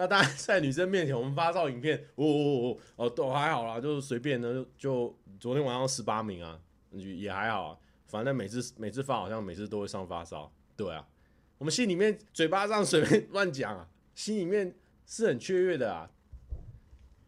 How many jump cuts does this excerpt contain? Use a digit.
2